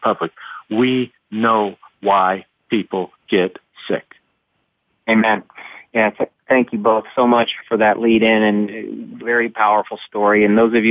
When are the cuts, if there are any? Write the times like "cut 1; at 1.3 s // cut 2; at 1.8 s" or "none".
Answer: cut 1; at 7.6 s // cut 2; at 9.2 s